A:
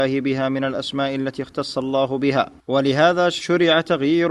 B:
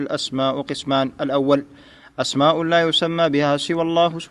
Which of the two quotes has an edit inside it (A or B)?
A